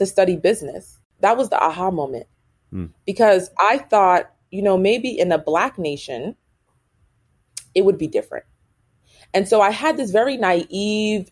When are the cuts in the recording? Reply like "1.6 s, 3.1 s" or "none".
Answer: none